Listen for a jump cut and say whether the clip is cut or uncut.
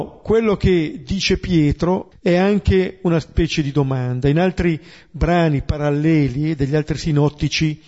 cut